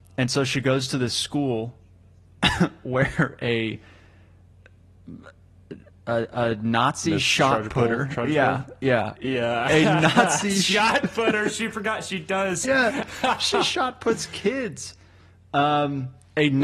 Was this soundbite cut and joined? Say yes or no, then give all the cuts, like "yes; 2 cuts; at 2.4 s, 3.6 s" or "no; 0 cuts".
yes; 1 cut; at 12.6 s